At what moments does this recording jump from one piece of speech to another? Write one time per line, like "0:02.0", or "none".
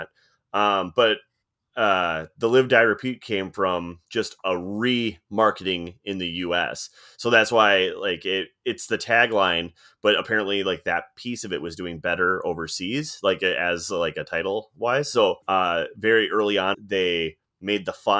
0:15.4
0:16.7